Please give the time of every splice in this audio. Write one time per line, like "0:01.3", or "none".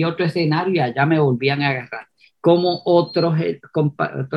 0:02.3